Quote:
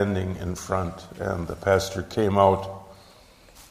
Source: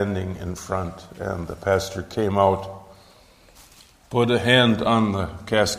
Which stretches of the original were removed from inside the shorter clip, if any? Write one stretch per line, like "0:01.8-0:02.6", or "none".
none